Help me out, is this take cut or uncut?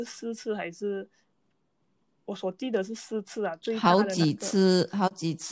uncut